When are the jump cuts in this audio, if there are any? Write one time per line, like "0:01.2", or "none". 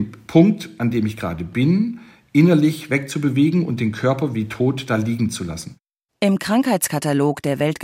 none